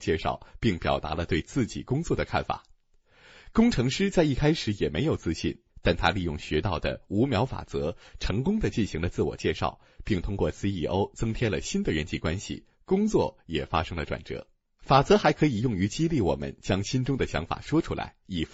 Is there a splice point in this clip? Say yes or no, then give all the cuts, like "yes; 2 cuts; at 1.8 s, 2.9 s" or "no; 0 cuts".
yes; 2 cuts; at 5.7 s, 14.8 s